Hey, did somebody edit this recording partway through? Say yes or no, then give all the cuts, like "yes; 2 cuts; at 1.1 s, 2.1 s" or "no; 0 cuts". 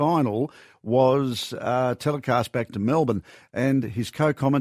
no; 0 cuts